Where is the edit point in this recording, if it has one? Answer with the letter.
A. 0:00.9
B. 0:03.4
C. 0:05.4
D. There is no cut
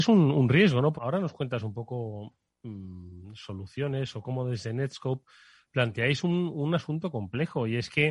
A